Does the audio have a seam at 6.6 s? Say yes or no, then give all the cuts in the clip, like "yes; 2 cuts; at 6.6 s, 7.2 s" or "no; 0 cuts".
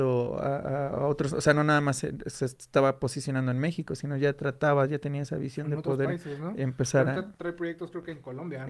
no; 0 cuts